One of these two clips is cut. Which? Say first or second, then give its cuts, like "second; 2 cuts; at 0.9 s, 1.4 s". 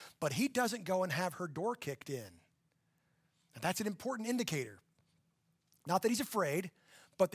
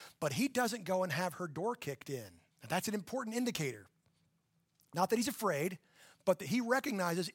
second; 1 cut; at 2.5 s